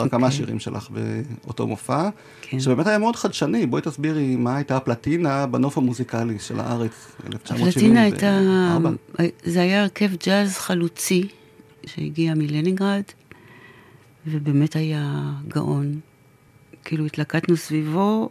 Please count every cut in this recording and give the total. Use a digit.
1